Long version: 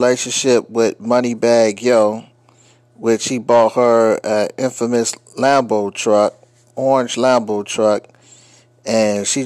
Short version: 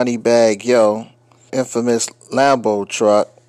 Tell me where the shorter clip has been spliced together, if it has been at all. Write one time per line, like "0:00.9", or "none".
0:01.5